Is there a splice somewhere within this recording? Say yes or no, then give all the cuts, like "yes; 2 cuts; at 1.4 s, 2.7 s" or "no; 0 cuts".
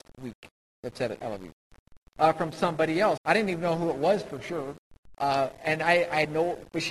yes; 2 cuts; at 2.0 s, 3.2 s